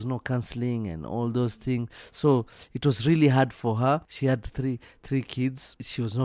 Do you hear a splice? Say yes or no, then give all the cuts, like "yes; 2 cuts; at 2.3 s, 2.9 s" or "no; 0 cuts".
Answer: no; 0 cuts